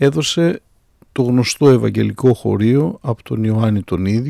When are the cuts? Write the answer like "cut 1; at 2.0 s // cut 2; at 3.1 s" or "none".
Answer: none